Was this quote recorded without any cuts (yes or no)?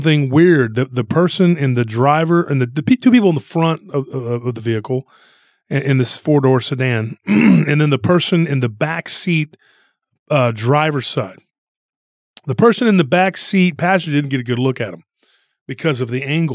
yes